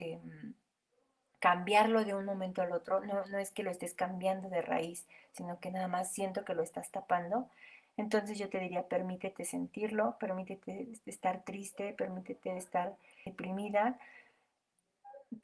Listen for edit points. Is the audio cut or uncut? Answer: cut